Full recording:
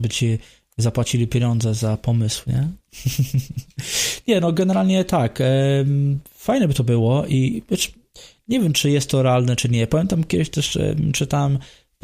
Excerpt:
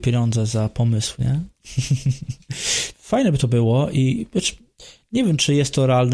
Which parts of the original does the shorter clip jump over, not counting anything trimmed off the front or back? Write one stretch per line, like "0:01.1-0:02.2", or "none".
0:04.2-0:06.3